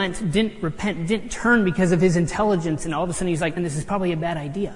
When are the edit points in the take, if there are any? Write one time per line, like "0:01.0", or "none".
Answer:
0:03.6